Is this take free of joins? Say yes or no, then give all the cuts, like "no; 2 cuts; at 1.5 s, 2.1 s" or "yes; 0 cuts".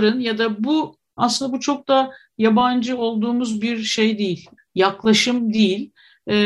no; 2 cuts; at 1.2 s, 4.6 s